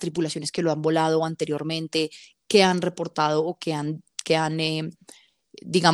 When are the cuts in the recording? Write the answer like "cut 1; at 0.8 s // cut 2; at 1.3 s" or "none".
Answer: none